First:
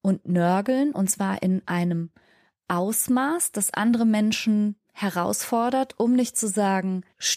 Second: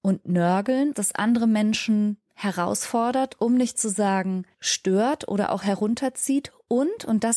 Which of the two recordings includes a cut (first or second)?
second